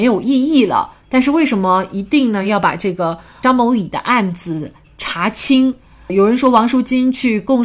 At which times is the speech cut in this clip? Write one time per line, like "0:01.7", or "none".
none